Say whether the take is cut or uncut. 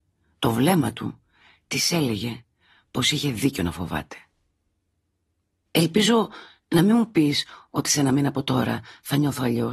uncut